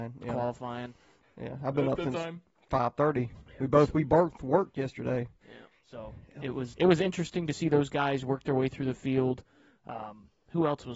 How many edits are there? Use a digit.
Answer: 3